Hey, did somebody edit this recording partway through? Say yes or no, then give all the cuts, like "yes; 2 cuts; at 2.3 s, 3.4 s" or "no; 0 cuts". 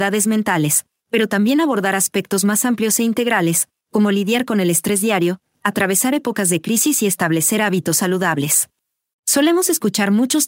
yes; 2 cuts; at 5.6 s, 9.1 s